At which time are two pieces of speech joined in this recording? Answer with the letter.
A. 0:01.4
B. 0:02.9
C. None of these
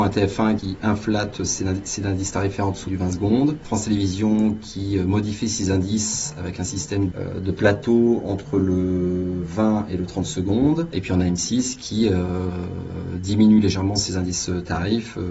B